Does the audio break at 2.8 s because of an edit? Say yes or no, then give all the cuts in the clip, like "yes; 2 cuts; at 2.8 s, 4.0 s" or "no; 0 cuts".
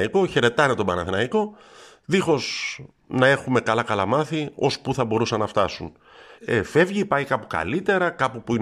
no; 1 cut; at 6.4 s